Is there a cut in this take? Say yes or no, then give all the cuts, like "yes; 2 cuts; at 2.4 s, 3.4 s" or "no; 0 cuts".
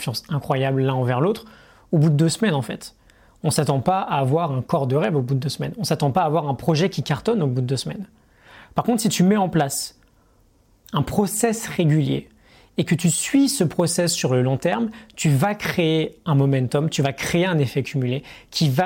no; 0 cuts